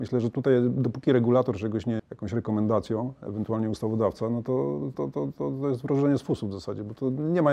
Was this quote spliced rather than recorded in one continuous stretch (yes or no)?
yes